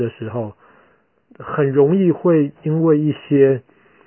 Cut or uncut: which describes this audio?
cut